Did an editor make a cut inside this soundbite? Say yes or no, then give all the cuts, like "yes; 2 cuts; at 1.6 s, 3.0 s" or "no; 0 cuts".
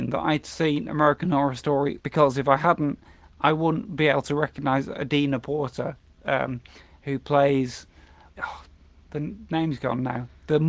yes; 2 cuts; at 2.0 s, 8.3 s